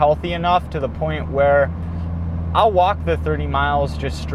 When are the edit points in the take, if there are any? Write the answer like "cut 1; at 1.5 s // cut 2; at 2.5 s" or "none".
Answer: none

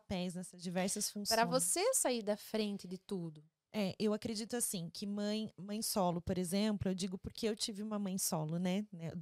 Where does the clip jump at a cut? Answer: none

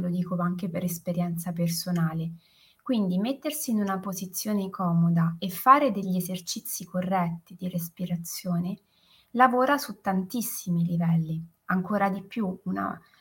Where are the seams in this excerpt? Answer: none

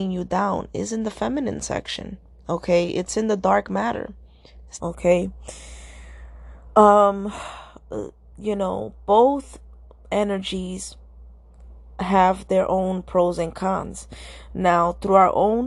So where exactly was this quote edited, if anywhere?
cut 1; at 4.8 s

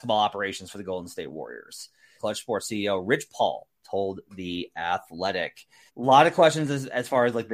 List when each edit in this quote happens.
cut 1; at 2.2 s // cut 2; at 5.9 s

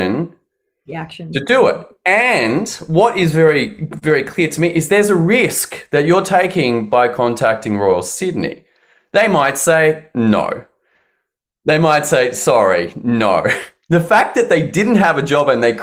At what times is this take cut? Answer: none

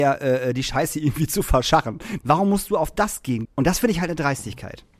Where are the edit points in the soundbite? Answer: cut 1; at 2.2 s // cut 2; at 3.4 s

